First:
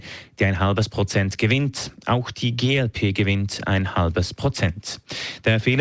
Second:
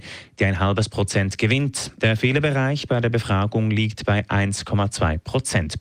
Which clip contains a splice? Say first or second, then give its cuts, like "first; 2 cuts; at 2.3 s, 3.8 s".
second; 1 cut; at 2.0 s